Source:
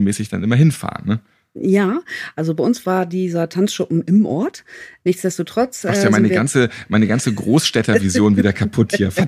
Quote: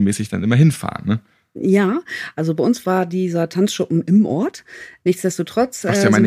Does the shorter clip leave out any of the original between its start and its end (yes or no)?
no